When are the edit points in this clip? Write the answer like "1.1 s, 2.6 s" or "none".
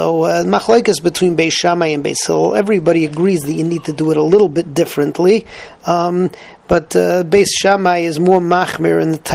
none